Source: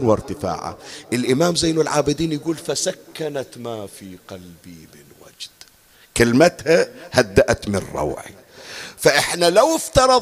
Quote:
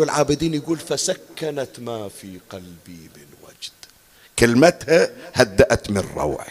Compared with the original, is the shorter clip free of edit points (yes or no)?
yes